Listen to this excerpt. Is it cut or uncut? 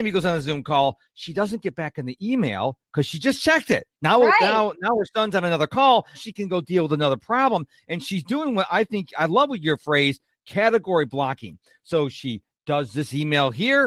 cut